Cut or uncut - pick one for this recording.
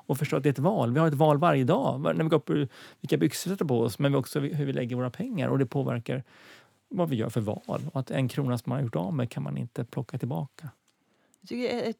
uncut